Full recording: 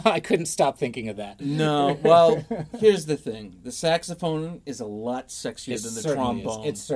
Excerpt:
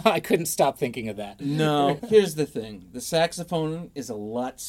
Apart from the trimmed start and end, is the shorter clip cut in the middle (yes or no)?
yes